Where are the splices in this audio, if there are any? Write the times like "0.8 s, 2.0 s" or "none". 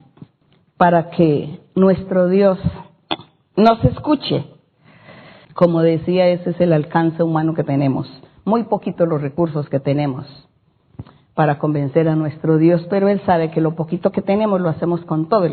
5.4 s